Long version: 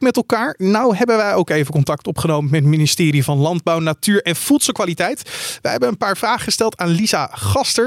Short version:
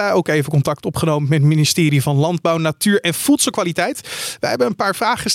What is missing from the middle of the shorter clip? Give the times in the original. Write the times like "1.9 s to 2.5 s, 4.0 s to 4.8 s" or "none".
none